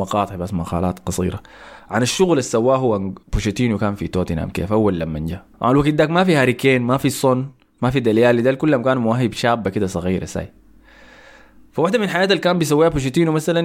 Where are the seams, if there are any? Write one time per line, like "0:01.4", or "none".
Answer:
0:03.2
0:05.5